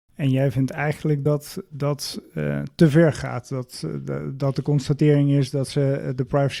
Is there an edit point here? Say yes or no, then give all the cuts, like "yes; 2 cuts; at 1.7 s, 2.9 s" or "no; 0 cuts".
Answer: no; 0 cuts